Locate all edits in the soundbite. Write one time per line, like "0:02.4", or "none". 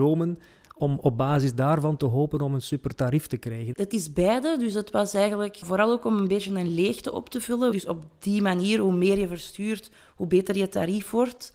0:03.7
0:07.7